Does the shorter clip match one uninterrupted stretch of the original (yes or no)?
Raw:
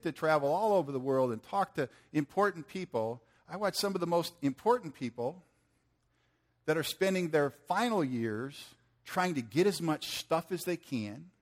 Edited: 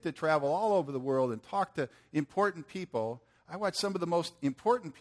yes